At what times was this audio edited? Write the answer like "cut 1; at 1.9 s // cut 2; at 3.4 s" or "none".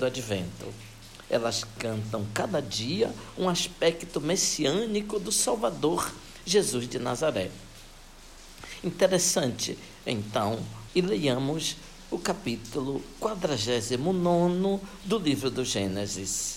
cut 1; at 10.9 s

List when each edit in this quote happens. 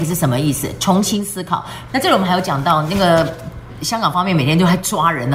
cut 1; at 1.9 s

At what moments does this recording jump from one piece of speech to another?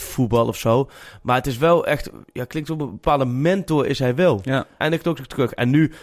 cut 1; at 4.8 s

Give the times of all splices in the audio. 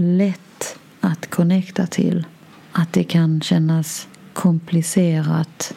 none

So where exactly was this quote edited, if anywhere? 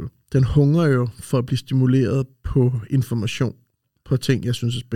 none

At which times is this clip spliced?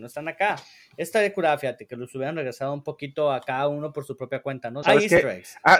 cut 1; at 4.8 s

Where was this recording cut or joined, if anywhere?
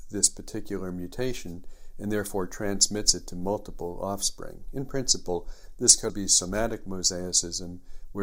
cut 1; at 6.1 s

